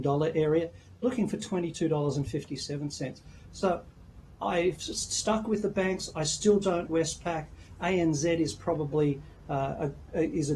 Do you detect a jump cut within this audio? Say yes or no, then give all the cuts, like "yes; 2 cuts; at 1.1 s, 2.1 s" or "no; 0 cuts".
yes; 1 cut; at 6.9 s